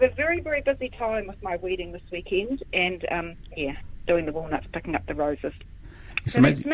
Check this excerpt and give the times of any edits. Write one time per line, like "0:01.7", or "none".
none